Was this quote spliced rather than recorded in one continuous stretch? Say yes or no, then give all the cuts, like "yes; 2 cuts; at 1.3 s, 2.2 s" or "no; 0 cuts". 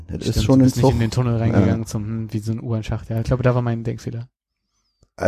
no; 0 cuts